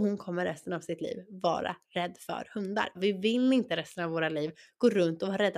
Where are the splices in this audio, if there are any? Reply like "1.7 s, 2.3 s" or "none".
2.9 s